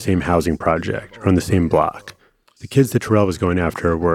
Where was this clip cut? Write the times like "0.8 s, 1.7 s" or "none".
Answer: 2.6 s